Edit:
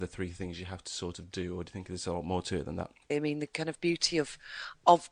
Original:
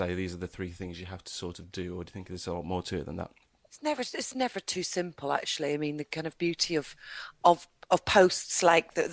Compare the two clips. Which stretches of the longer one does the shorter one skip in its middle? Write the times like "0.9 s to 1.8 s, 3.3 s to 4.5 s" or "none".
3.5 s to 5.7 s